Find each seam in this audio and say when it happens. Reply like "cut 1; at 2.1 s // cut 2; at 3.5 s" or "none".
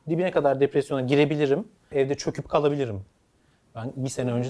cut 1; at 1.9 s